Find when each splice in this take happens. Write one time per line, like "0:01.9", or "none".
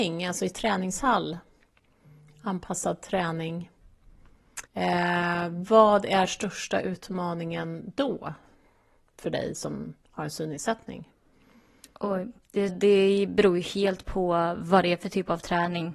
0:04.7
0:12.7